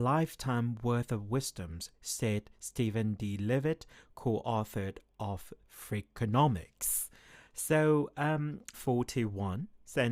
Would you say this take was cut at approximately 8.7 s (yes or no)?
yes